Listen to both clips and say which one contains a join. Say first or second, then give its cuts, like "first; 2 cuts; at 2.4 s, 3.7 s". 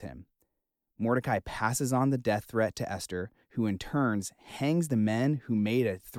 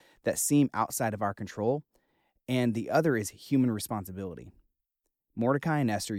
first; 1 cut; at 3.4 s